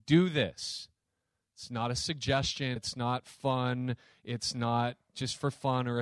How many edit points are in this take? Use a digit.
1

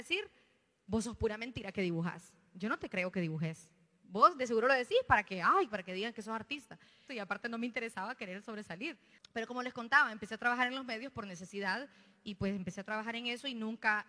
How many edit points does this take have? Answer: 2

